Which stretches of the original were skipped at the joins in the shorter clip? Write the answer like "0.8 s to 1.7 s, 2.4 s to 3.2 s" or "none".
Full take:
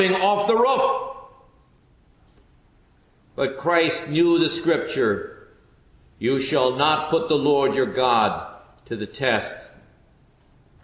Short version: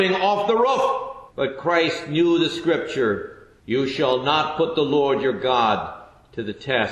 1.3 s to 3.3 s, 5.6 s to 6.1 s